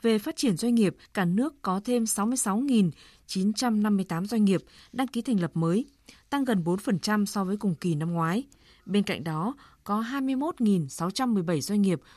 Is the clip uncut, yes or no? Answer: no